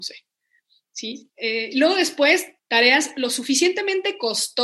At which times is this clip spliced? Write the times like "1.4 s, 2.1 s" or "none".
1.3 s, 2.6 s